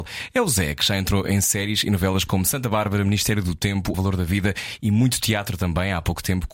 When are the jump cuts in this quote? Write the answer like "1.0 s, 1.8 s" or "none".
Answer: 3.9 s